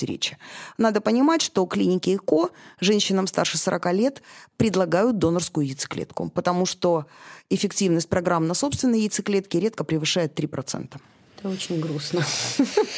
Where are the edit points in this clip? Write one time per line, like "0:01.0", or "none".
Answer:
none